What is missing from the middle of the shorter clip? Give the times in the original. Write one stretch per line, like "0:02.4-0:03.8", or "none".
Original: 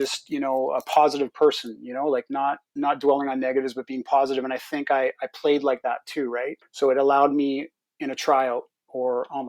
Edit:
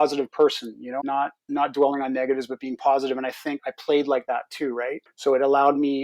0:02.0-0:02.3
0:04.8-0:05.1